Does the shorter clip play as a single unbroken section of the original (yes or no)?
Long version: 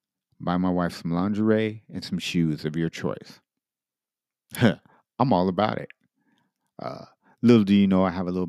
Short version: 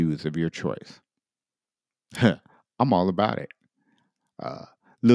yes